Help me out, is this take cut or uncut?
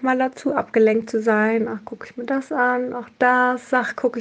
uncut